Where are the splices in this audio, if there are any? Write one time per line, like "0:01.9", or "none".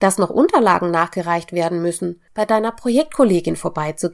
0:02.3

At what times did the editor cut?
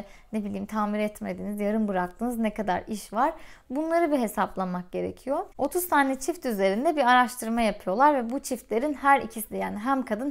0:05.5

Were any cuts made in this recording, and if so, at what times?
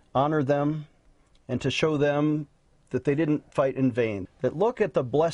0:04.3

